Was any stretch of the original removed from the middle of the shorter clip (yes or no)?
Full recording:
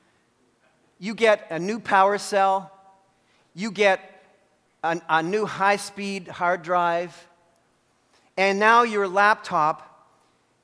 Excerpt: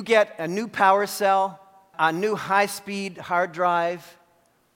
yes